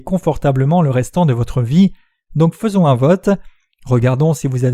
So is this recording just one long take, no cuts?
yes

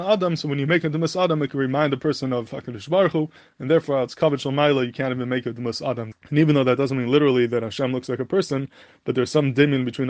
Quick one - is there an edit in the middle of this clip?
yes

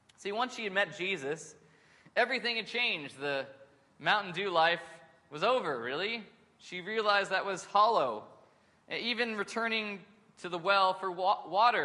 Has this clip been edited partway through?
no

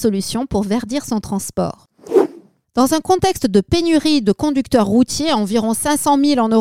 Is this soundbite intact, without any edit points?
yes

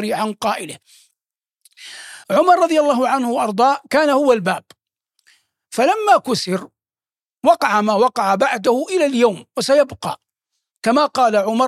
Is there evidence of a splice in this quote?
no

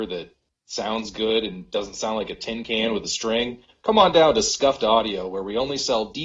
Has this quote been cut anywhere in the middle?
no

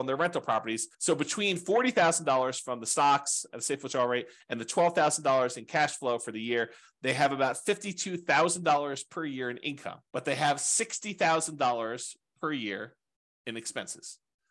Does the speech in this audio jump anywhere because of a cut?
yes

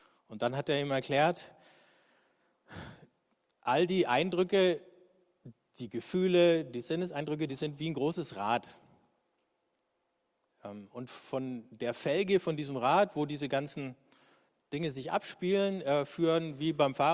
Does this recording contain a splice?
yes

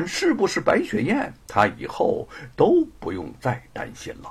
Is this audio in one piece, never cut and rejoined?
no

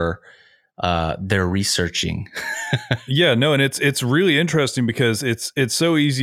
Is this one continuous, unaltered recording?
yes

